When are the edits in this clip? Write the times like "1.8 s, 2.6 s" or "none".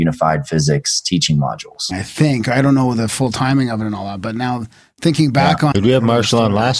1.9 s, 5.7 s